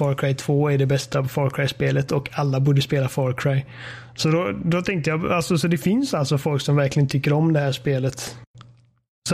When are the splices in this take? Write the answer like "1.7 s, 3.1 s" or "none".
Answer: none